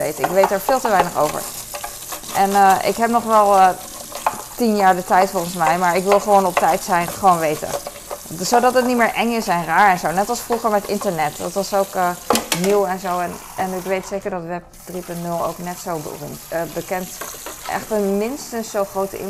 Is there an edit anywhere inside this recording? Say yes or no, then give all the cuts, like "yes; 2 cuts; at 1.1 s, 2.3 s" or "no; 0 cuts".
yes; 2 cuts; at 7.1 s, 17.6 s